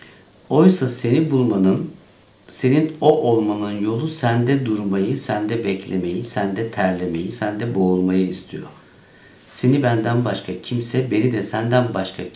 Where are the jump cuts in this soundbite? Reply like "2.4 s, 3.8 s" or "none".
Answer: 7.3 s